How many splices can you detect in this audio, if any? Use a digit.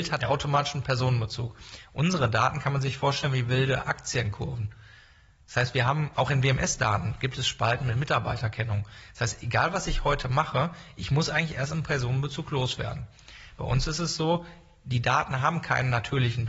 1